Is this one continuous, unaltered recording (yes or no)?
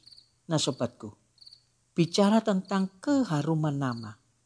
yes